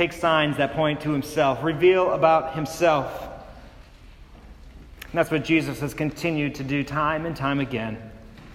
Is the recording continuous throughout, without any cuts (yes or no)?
no